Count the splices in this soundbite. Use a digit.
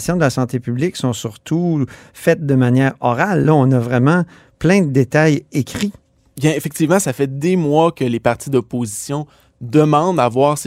0